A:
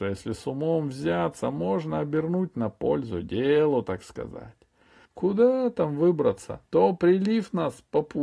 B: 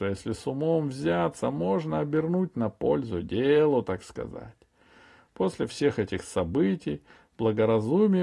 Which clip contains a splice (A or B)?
A